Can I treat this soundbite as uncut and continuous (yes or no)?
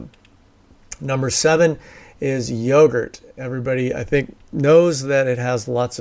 yes